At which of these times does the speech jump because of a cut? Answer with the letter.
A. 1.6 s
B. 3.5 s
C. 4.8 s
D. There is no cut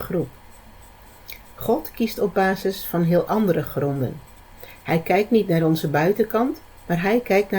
D